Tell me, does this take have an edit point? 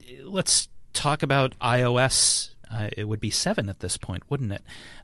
no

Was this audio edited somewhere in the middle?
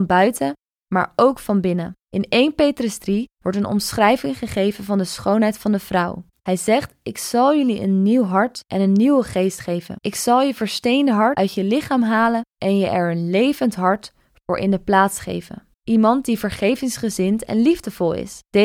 yes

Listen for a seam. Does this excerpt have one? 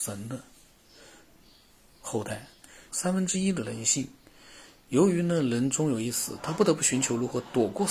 yes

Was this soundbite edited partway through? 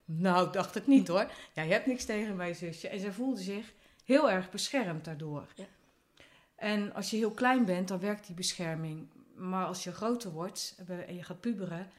no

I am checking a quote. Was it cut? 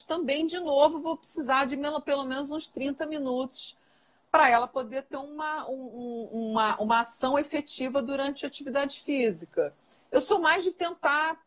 no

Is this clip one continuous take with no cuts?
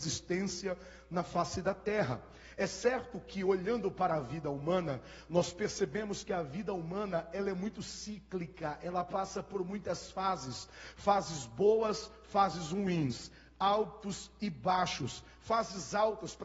yes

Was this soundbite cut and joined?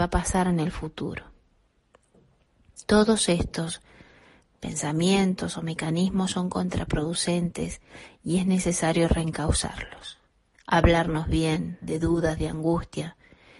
yes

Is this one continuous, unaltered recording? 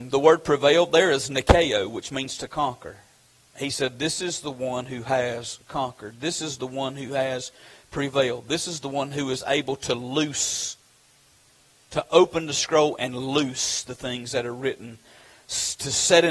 yes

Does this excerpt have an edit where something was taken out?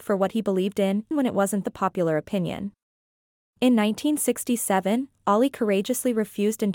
yes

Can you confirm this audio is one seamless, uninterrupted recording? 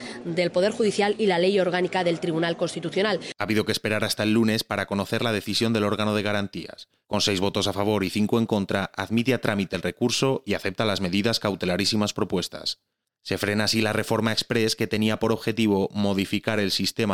yes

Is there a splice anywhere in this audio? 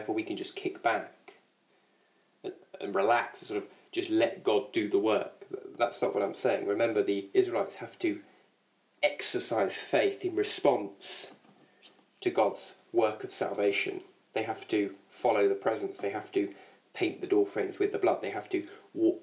no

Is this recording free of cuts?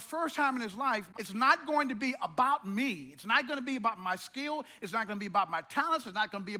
no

